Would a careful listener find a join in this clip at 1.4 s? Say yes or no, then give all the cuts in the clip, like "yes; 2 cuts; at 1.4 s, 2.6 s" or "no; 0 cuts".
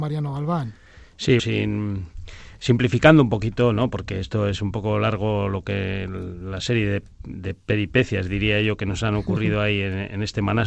yes; 1 cut; at 1.4 s